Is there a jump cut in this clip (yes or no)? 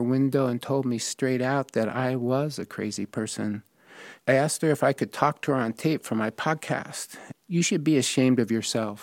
yes